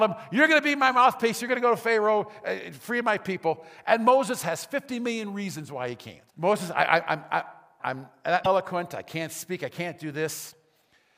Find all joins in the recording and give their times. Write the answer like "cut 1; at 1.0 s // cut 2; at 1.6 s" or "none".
cut 1; at 6.3 s // cut 2; at 7.8 s